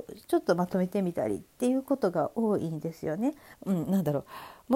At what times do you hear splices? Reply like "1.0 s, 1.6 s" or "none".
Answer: 3.5 s